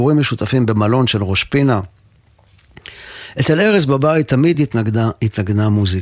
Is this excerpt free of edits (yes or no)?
yes